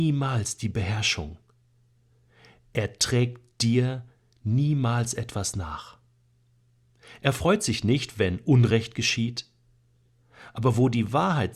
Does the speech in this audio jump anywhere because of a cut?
no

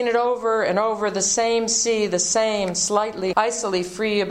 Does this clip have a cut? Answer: yes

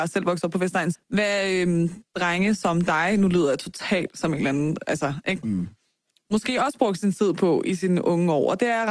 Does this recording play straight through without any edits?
no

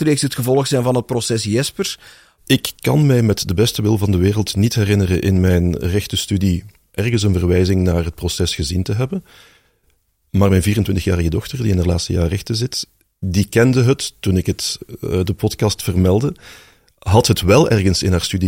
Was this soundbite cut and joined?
yes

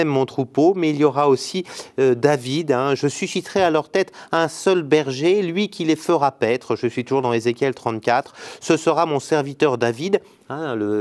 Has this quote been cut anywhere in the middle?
no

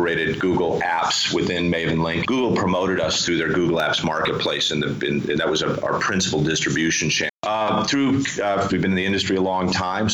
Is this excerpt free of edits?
no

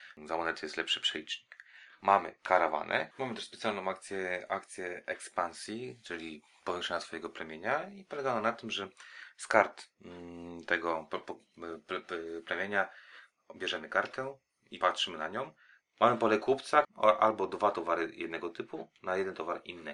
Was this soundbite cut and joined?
yes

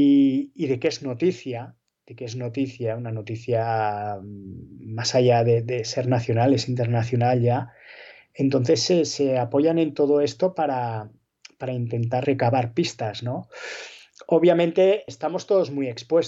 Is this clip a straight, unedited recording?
no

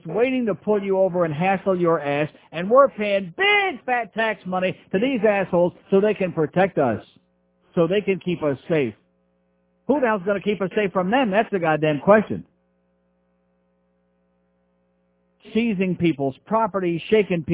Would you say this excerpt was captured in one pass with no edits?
yes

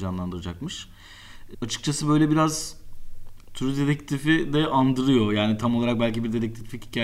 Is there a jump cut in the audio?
yes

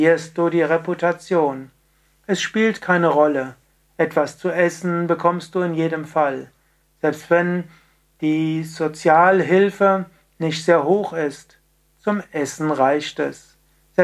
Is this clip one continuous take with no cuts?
yes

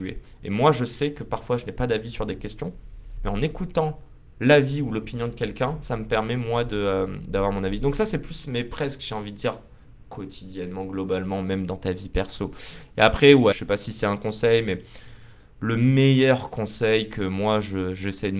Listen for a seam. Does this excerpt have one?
yes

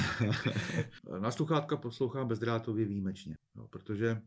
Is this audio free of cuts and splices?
no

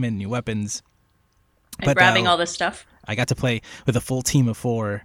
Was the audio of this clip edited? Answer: yes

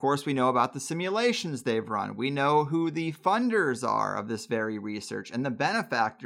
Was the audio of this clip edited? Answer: no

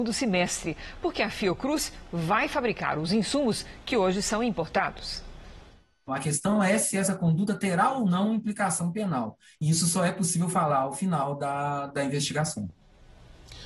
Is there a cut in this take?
yes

